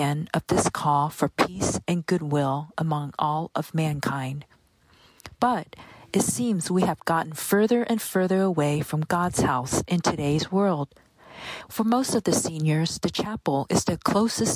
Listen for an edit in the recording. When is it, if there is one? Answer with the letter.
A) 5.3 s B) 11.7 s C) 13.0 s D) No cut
B